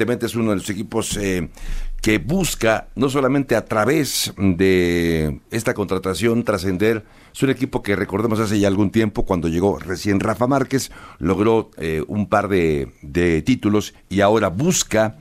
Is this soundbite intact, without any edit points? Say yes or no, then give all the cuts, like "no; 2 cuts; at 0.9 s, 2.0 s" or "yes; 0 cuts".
yes; 0 cuts